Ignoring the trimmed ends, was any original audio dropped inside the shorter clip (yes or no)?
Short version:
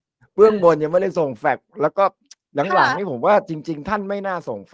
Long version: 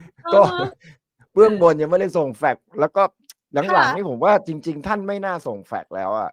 no